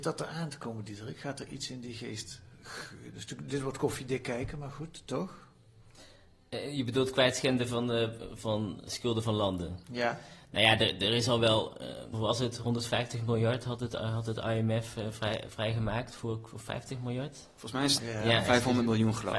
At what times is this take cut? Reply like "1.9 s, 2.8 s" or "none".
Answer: 12.1 s, 18.0 s